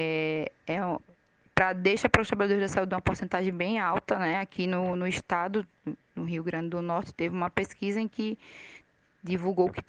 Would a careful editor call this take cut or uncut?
uncut